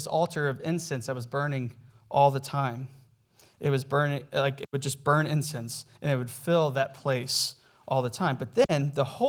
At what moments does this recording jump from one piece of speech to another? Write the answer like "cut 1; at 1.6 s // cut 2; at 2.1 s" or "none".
none